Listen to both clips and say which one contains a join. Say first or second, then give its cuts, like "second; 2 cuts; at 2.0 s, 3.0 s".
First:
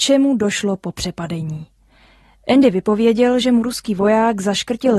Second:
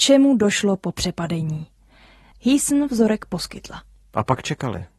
second; 1 cut; at 2.3 s